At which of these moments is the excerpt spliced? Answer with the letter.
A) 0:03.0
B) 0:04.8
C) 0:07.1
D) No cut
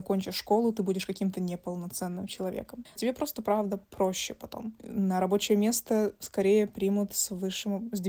A